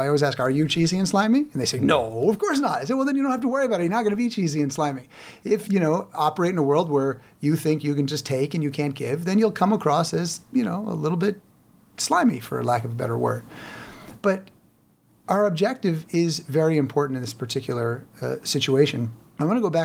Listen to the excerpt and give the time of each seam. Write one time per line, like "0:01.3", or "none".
0:05.6